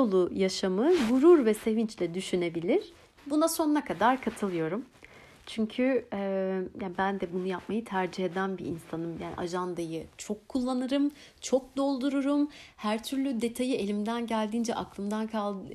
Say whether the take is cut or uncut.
cut